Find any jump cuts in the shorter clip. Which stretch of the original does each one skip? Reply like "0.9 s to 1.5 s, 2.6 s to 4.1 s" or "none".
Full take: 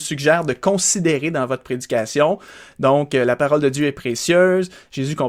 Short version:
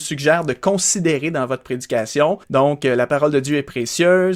2.4 s to 2.7 s

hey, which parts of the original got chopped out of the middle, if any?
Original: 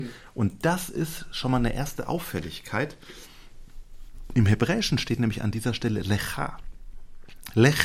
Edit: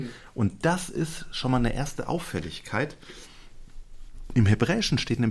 none

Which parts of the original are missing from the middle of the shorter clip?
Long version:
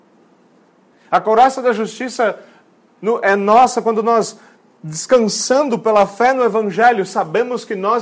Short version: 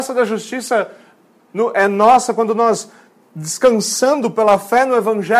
none

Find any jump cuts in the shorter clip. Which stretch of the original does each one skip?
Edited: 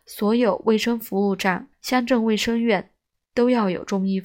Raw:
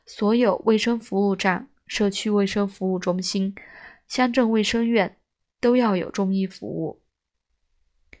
1.7 s to 4.0 s

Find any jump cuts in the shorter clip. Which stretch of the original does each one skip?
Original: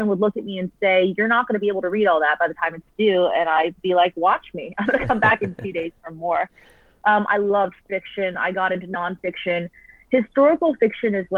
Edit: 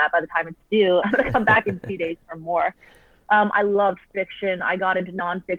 3.3 s to 4.8 s

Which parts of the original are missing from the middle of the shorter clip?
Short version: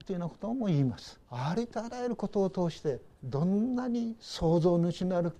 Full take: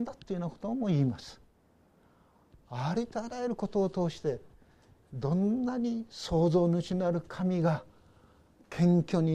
1.4 s to 2.6 s, 4.5 s to 5.0 s

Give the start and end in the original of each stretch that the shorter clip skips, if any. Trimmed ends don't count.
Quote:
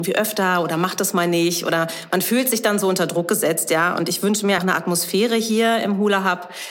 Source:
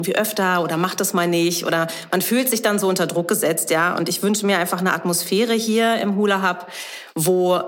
4.6 s to 4.8 s

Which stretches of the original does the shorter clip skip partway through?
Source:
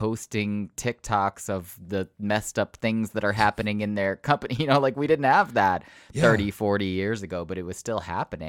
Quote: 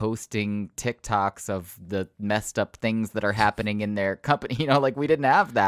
none

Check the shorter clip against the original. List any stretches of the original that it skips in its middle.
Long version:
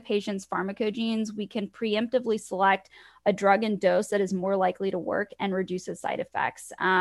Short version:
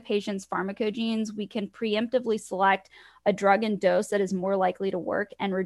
none

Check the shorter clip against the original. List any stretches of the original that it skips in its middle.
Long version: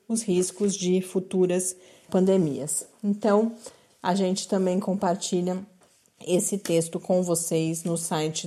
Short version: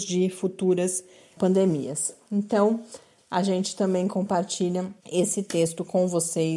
5.7 s to 6.1 s

